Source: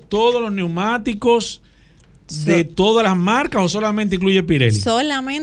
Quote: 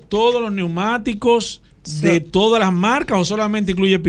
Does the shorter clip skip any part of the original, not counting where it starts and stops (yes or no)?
yes